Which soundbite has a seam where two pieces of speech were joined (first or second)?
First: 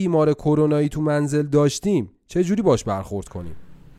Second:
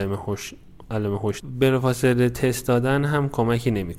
second